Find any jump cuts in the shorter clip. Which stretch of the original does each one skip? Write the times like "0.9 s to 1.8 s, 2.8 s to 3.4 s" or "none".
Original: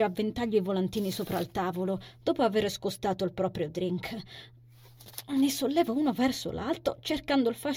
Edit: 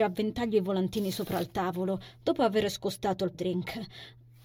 3.3 s to 3.7 s